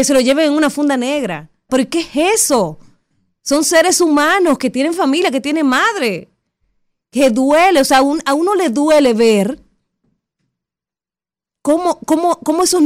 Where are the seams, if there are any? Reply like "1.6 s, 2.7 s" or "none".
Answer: 1.7 s